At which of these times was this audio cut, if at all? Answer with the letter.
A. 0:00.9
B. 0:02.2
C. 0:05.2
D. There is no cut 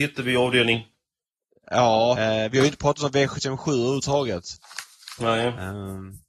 B